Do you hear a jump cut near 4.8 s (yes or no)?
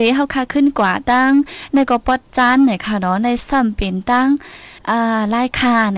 yes